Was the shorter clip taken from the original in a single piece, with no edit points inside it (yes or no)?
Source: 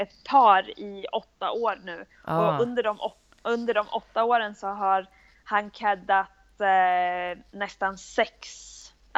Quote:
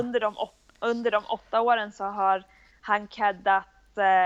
yes